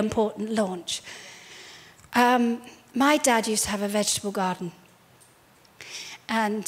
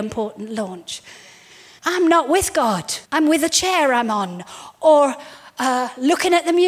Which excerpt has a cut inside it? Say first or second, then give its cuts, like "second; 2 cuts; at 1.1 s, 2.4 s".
second; 2 cuts; at 1.8 s, 3.0 s